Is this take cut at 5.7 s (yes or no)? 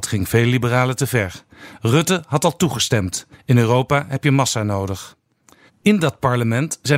yes